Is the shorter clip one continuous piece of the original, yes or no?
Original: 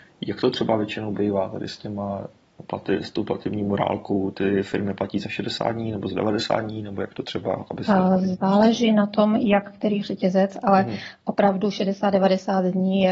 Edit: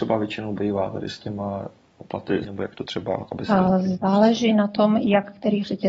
no